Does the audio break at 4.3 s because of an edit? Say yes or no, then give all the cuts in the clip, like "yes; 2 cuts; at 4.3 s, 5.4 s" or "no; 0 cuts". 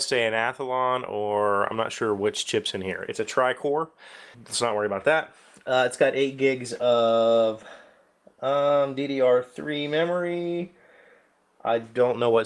yes; 1 cut; at 4.3 s